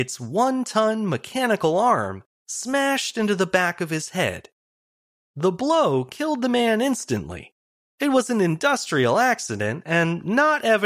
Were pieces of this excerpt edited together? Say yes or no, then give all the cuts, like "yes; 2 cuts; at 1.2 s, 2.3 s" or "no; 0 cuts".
yes; 1 cut; at 7.8 s